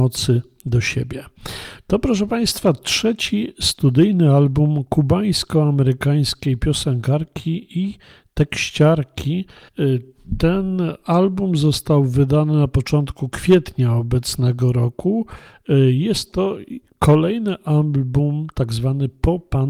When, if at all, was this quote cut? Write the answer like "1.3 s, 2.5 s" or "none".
9.7 s